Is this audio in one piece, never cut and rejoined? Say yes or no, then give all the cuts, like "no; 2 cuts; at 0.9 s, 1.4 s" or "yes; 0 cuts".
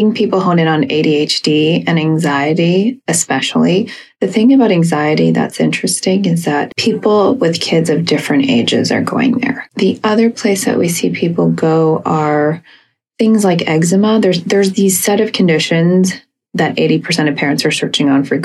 yes; 0 cuts